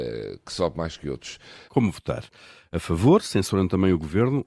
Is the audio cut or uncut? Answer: cut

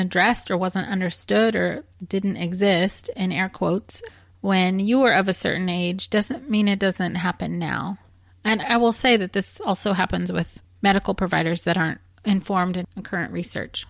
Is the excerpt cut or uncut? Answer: uncut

